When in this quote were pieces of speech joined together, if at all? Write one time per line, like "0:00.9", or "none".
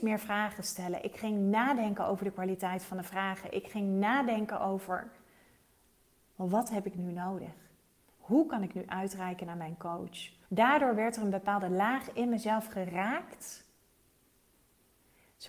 0:10.5